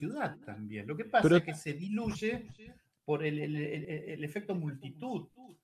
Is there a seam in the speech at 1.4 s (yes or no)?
no